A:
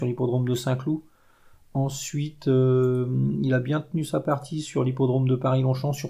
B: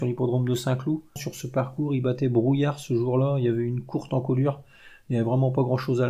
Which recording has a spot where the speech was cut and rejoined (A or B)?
B